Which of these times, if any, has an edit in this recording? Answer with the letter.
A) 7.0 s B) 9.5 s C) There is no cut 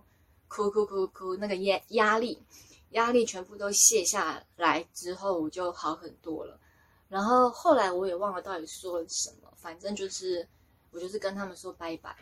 C